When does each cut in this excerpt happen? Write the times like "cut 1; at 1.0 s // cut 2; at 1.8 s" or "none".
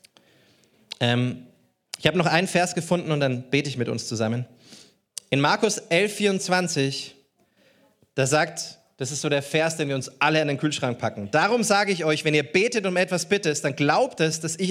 none

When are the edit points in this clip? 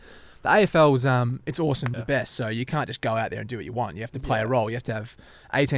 cut 1; at 1.9 s

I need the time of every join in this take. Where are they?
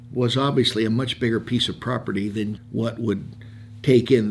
cut 1; at 2.6 s

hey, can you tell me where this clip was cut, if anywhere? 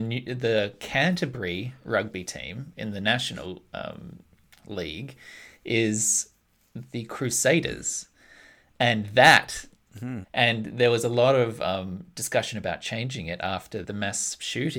cut 1; at 10.2 s // cut 2; at 13.8 s

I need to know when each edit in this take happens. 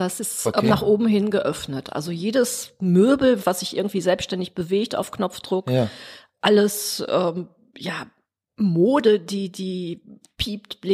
cut 1; at 3.4 s

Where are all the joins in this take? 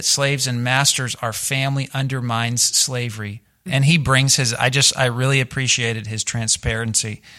cut 1; at 3.7 s

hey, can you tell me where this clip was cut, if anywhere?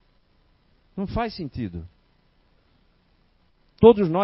none

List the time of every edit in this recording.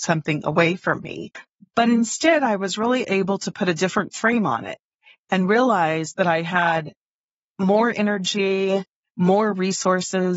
none

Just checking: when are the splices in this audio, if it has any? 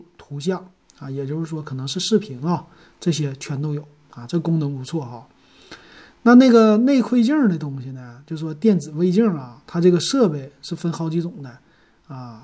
none

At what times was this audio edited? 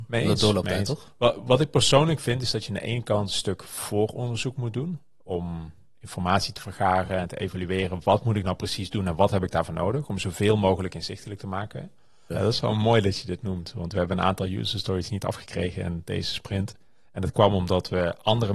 cut 1; at 12.3 s

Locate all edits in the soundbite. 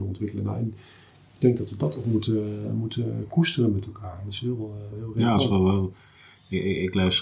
cut 1; at 4.9 s

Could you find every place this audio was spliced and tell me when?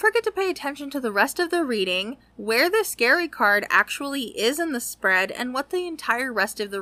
none

